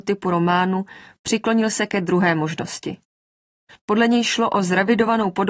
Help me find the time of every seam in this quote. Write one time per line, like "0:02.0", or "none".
0:03.8